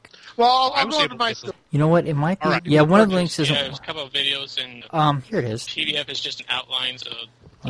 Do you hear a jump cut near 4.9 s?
yes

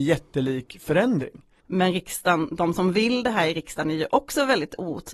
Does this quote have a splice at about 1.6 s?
yes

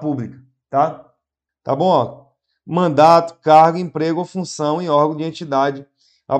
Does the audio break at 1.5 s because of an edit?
yes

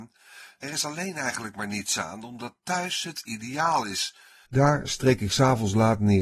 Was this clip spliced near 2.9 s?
no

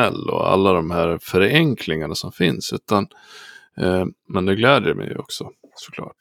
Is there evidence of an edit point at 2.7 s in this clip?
no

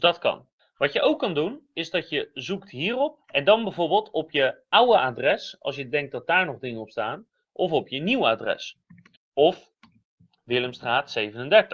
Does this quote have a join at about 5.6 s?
no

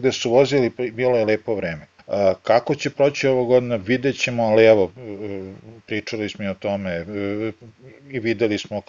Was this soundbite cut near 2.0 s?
yes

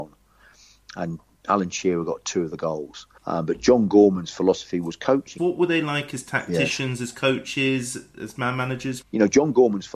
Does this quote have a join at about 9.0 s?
yes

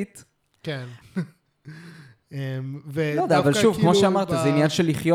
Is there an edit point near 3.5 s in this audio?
no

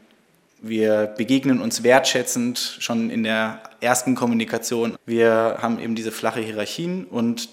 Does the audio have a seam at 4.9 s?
yes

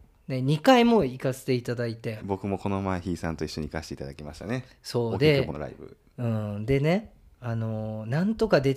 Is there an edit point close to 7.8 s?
no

